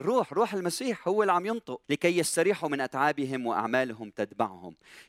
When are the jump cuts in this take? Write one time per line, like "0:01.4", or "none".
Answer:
0:01.8